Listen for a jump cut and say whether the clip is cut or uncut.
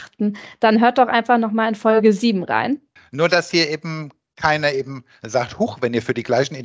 cut